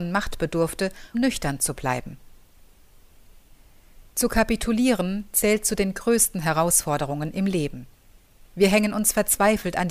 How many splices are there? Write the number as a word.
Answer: one